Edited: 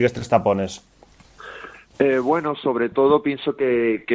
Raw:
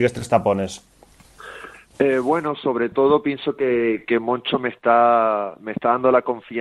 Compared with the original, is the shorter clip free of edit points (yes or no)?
yes